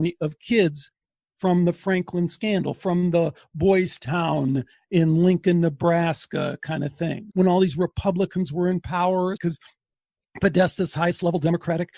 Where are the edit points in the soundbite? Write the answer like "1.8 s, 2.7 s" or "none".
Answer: 7.3 s, 9.4 s